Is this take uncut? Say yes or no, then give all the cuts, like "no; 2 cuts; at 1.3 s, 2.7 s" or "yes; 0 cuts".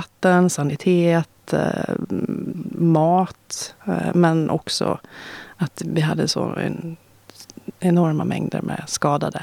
yes; 0 cuts